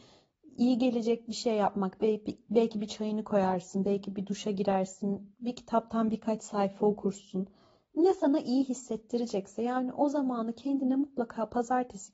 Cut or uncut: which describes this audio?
cut